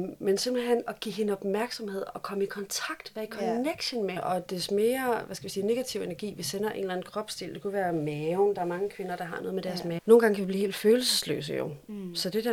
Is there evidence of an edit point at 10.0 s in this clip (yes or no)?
yes